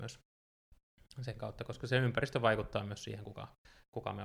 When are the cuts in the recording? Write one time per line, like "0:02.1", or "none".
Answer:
none